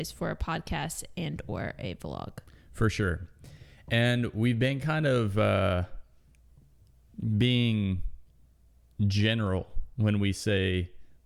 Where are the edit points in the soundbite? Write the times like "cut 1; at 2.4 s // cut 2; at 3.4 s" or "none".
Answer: none